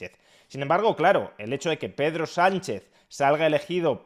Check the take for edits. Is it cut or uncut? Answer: uncut